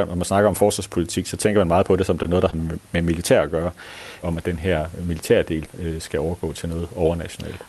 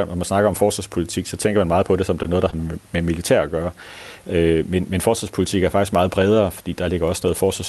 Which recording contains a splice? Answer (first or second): first